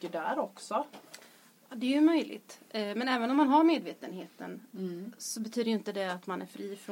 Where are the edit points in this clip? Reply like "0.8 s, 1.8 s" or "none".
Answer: none